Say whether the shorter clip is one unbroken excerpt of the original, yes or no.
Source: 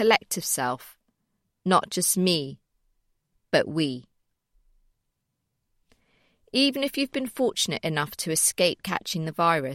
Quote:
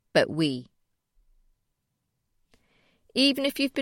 yes